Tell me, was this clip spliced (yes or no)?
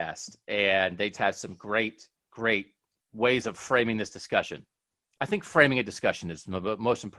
yes